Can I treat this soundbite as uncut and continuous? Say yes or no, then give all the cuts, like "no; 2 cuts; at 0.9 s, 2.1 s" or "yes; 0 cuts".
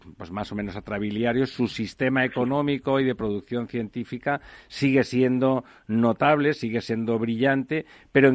yes; 0 cuts